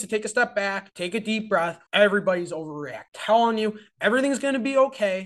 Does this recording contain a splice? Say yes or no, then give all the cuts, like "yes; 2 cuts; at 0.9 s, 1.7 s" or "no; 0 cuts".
yes; 1 cut; at 1.9 s